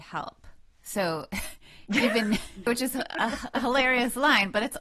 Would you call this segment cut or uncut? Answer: cut